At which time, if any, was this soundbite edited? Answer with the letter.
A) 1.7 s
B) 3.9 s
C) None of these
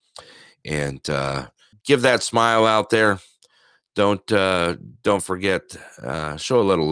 A